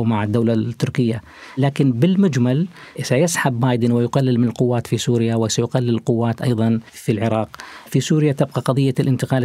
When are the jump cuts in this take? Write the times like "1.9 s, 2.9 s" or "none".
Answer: 6.9 s